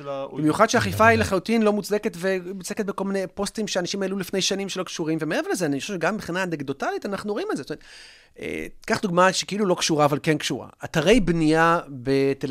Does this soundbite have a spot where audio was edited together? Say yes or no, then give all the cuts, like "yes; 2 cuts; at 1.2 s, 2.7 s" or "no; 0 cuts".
no; 0 cuts